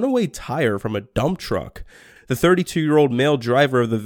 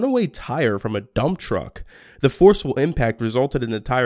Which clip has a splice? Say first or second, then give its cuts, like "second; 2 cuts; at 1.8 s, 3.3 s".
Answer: first; 1 cut; at 2.2 s